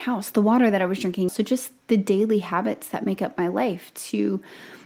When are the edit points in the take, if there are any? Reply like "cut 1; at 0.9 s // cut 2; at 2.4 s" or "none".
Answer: cut 1; at 1.3 s